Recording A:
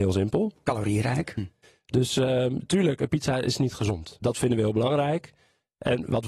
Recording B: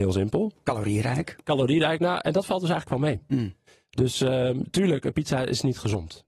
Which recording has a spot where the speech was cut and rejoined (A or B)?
A